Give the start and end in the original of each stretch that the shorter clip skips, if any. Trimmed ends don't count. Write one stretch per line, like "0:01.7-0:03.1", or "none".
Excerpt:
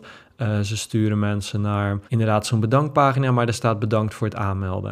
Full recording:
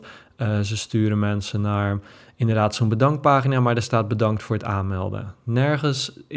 0:02.1-0:02.3